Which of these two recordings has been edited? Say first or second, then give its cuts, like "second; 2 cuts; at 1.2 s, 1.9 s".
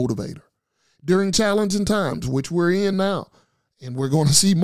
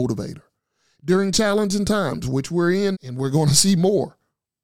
second; 1 cut; at 2.9 s